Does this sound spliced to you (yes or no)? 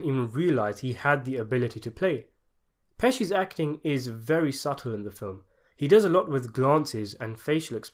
no